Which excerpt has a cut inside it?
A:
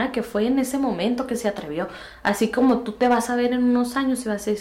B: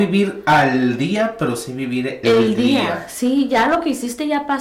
B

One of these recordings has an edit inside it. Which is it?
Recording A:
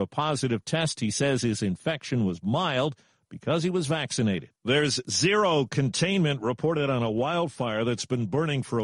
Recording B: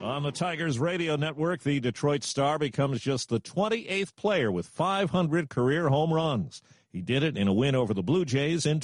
A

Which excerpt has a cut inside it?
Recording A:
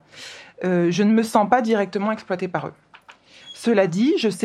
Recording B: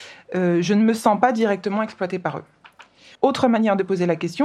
B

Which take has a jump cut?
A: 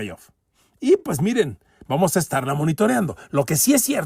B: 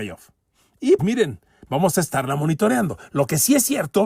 B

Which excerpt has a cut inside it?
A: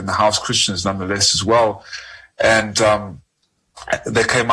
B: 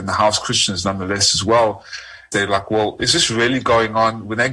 B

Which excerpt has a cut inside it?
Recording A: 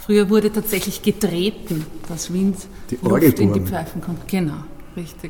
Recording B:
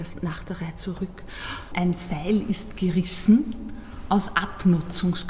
B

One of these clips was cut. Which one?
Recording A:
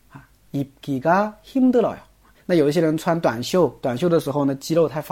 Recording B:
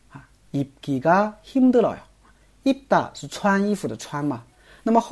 A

